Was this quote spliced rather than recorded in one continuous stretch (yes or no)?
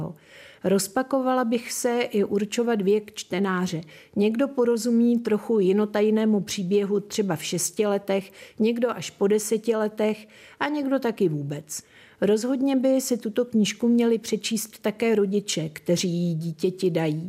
no